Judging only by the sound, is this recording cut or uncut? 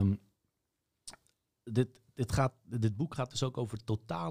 uncut